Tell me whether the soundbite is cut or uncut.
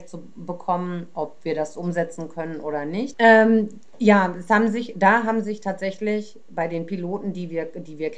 cut